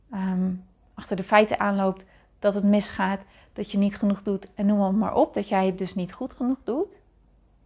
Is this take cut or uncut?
uncut